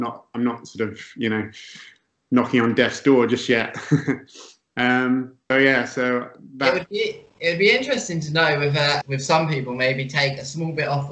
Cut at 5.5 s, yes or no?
yes